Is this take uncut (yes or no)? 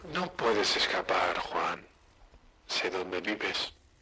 yes